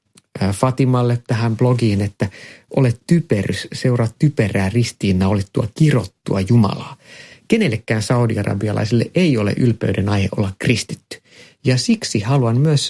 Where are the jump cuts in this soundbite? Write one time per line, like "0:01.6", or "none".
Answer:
0:11.5